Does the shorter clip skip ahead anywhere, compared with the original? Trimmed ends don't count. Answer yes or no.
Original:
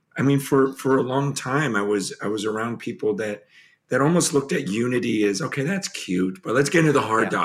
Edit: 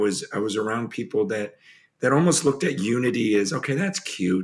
no